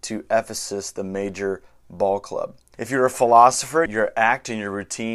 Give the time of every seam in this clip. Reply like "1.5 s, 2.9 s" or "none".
2.7 s, 3.9 s